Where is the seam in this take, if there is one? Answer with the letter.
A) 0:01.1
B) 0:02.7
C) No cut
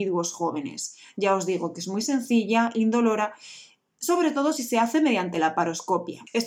C